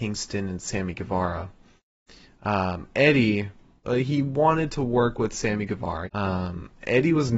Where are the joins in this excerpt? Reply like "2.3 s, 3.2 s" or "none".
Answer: 3.8 s, 6.0 s